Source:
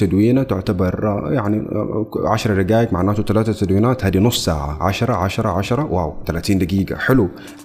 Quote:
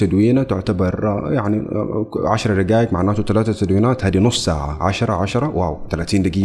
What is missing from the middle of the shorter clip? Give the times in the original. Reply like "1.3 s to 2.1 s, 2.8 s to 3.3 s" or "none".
5.1 s to 5.4 s